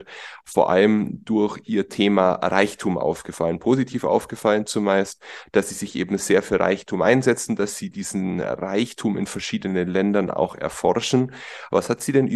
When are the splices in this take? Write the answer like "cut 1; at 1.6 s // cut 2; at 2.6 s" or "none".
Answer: none